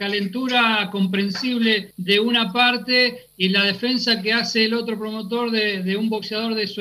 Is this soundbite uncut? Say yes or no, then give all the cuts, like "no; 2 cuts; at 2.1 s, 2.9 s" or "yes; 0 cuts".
yes; 0 cuts